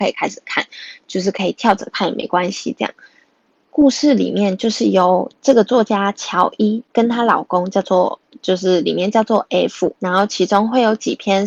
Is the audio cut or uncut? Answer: cut